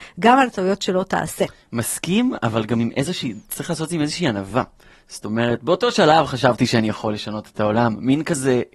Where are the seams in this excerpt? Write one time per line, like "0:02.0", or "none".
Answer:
none